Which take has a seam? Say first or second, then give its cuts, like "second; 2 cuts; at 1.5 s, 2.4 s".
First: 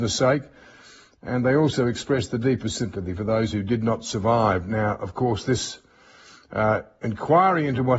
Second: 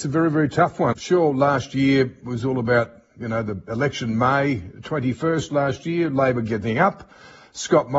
second; 1 cut; at 0.9 s